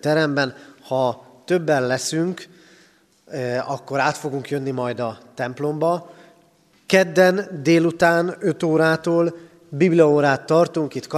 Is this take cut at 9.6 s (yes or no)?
no